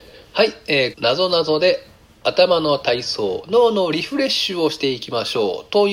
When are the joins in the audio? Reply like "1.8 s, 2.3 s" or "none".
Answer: 0.9 s